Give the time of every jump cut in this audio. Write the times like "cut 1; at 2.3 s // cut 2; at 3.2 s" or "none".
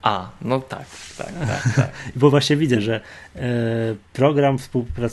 none